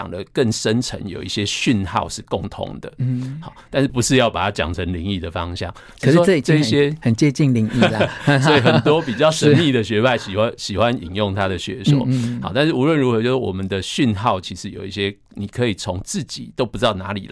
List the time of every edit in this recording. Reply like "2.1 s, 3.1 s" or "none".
3.9 s